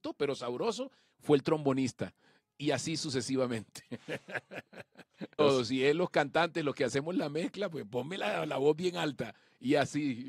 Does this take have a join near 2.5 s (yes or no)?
no